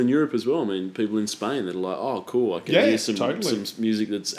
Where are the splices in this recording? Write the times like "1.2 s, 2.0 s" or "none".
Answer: none